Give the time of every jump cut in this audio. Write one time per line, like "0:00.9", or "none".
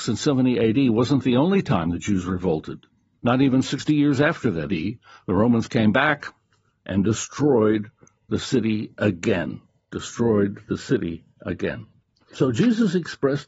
0:04.7
0:12.2